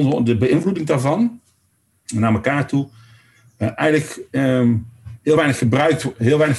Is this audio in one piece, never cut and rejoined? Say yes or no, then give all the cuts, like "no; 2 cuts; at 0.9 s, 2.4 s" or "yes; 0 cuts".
yes; 0 cuts